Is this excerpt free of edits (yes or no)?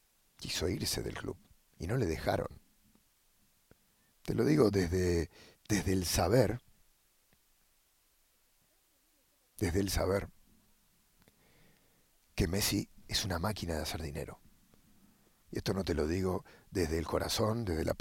no